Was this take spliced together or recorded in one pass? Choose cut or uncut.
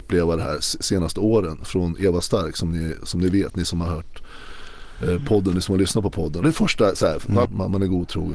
cut